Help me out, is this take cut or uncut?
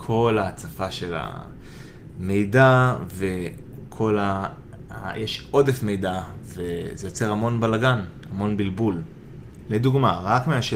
uncut